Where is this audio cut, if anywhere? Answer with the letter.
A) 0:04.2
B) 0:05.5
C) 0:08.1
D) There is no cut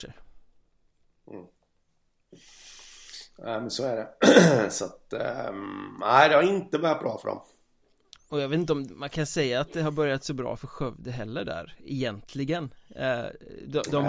D